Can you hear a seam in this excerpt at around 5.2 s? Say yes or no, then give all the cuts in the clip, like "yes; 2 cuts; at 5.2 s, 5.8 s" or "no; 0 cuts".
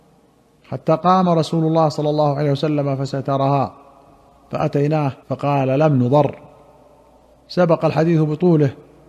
yes; 1 cut; at 5.2 s